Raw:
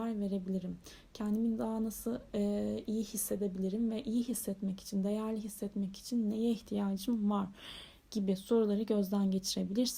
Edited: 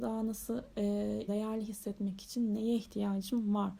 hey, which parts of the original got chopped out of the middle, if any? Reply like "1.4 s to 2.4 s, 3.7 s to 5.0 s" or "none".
2.8 s to 5.0 s